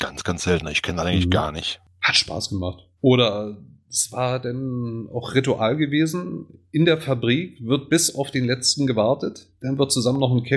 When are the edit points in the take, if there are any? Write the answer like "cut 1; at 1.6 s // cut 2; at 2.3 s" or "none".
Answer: cut 1; at 3.0 s